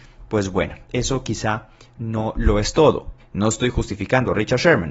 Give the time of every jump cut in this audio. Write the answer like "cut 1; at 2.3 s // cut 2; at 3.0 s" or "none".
cut 1; at 3.2 s

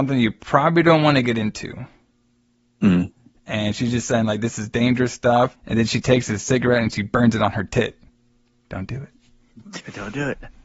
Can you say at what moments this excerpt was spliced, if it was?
cut 1; at 5.5 s // cut 2; at 8.5 s

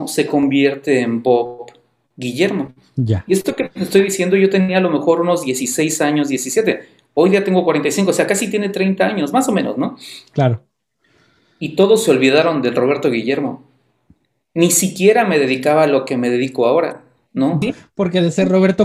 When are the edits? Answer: cut 1; at 17.6 s

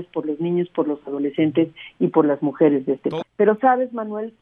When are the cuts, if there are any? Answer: cut 1; at 3.2 s

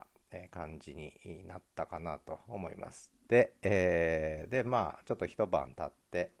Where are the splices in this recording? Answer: cut 1; at 3.3 s

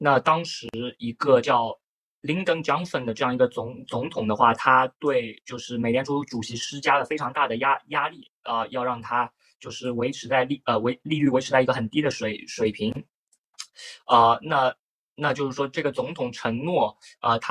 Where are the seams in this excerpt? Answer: none

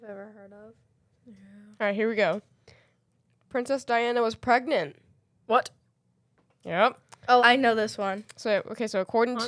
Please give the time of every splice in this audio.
cut 1; at 7.4 s

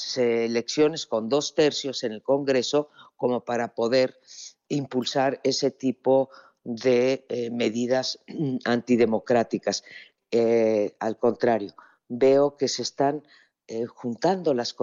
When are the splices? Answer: cut 1; at 10.2 s

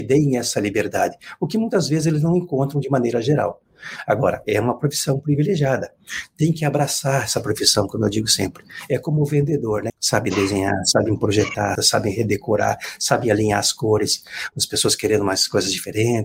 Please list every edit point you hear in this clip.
cut 1; at 9.9 s // cut 2; at 11.8 s // cut 3; at 14.5 s

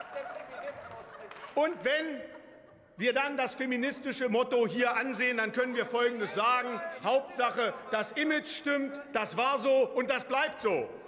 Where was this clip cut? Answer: cut 1; at 7.0 s

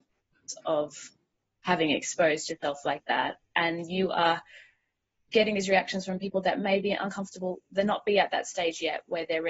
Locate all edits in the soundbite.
none

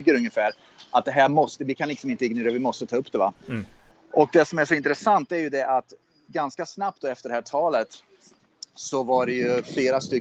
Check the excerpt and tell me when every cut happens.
none

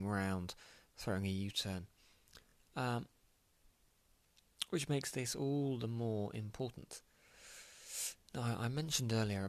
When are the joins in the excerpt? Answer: none

